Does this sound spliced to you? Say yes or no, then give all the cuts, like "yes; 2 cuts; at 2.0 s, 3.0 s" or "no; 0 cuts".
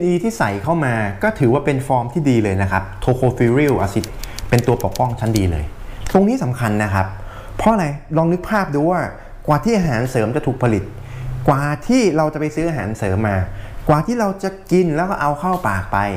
yes; 1 cut; at 4.1 s